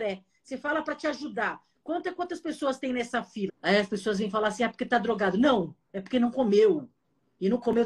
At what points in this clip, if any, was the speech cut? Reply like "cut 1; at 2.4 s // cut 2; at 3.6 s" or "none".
cut 1; at 3.5 s